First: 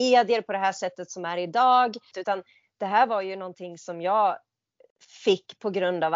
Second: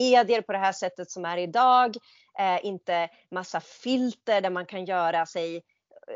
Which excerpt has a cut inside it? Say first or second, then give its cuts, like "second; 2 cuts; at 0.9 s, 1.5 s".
first; 1 cut; at 2.1 s